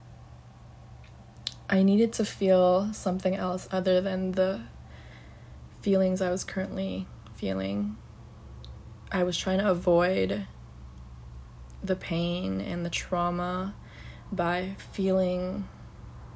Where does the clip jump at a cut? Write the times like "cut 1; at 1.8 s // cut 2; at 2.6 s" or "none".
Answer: none